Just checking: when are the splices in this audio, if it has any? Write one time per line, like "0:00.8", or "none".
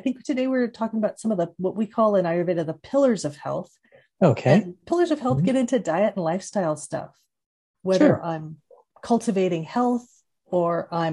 0:04.8